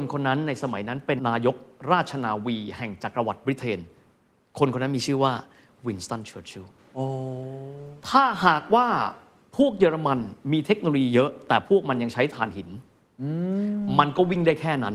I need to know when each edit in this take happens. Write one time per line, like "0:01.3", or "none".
0:01.2